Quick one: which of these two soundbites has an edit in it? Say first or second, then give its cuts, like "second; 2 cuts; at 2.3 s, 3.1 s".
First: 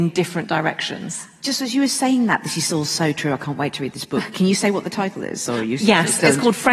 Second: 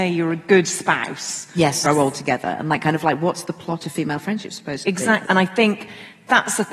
second; 2 cuts; at 1.8 s, 5.2 s